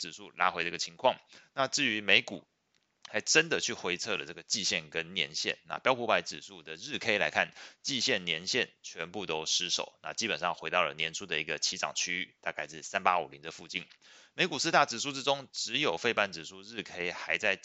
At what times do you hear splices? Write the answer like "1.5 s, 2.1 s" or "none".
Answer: none